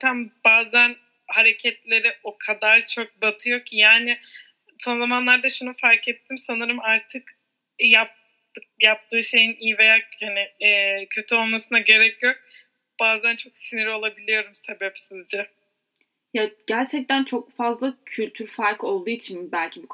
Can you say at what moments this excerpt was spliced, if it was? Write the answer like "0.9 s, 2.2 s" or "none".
none